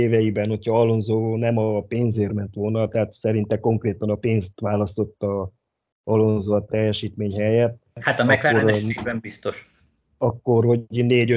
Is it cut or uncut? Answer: uncut